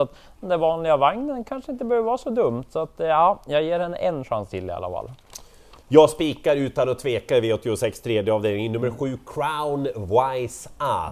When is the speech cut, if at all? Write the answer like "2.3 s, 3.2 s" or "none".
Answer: 5.8 s